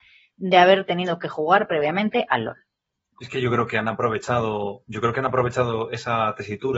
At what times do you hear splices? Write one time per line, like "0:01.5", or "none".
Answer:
none